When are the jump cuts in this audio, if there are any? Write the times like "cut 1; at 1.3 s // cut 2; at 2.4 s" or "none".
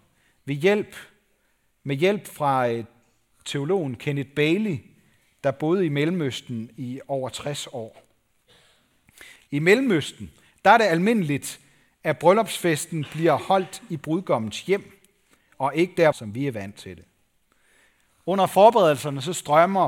cut 1; at 9.4 s // cut 2; at 16.1 s